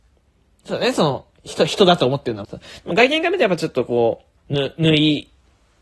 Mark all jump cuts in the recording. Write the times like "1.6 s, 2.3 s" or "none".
2.4 s, 4.4 s